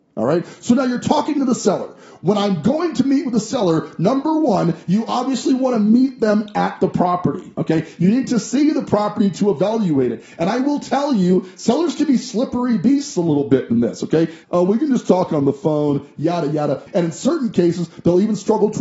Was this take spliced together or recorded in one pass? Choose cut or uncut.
cut